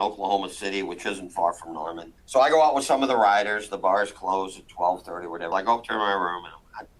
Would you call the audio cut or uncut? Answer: cut